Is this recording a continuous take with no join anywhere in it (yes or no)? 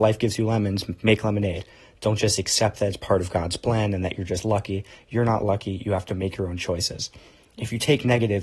yes